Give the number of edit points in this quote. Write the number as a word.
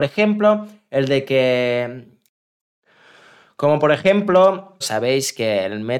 one